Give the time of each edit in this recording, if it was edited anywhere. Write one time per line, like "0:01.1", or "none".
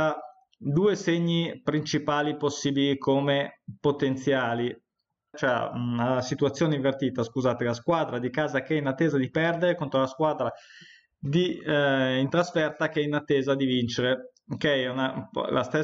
0:05.3